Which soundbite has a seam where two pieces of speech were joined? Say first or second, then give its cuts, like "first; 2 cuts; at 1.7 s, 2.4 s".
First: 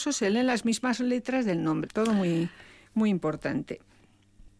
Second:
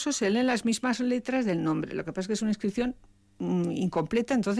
first; 1 cut; at 1.9 s